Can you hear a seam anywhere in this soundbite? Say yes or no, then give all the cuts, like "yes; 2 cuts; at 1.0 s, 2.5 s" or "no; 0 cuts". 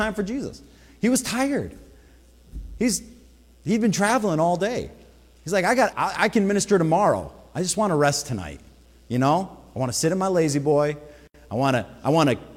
yes; 1 cut; at 5.9 s